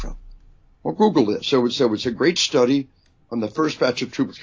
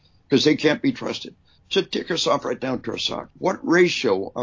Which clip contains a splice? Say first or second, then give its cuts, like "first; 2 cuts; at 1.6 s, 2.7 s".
second; 2 cuts; at 1.6 s, 3.3 s